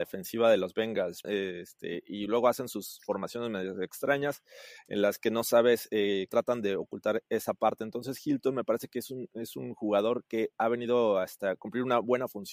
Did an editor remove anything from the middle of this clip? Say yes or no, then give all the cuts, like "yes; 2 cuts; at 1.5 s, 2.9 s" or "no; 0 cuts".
yes; 2 cuts; at 1.2 s, 6.3 s